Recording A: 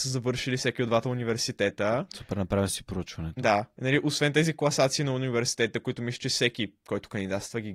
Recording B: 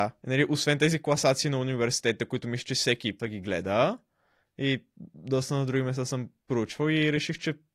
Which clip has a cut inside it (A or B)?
B